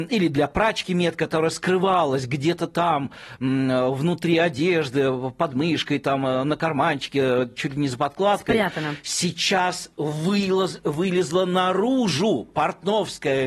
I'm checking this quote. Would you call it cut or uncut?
uncut